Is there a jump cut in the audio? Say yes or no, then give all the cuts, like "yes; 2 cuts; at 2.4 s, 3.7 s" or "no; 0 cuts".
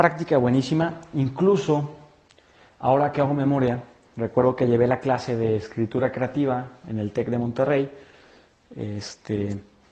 no; 0 cuts